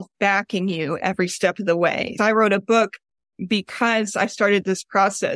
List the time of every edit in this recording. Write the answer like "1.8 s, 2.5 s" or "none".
2.2 s